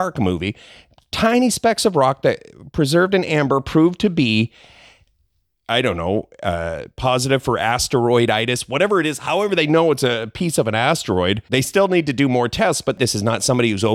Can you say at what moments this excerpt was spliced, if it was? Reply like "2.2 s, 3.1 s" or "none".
11.5 s